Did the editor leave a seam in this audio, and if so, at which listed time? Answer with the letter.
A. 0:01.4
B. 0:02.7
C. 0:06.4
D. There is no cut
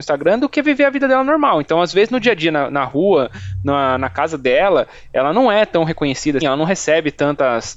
C